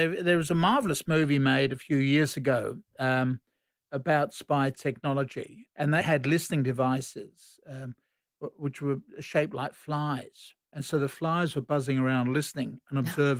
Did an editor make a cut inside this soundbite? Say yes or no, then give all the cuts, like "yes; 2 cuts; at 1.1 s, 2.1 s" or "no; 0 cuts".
yes; 2 cuts; at 6.0 s, 10.6 s